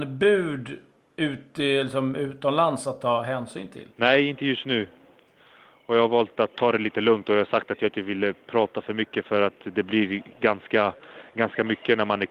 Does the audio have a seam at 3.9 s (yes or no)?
yes